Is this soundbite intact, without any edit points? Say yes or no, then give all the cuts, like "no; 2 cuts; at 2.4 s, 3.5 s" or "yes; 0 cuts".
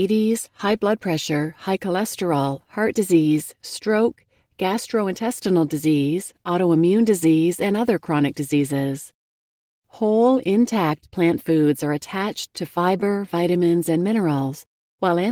yes; 0 cuts